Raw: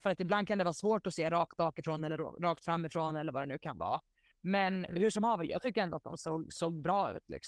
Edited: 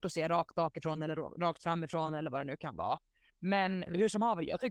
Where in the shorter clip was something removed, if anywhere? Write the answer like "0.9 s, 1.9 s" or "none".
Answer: none